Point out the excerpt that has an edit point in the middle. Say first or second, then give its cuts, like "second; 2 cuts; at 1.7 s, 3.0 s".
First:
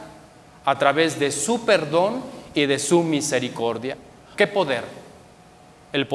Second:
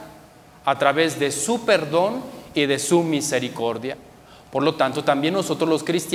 first; 1 cut; at 4.3 s